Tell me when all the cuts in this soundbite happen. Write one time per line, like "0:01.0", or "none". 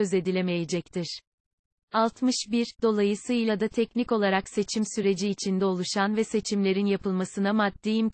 0:01.8